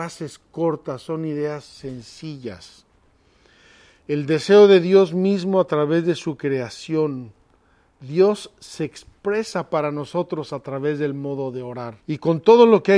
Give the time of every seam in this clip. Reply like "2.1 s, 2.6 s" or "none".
12.0 s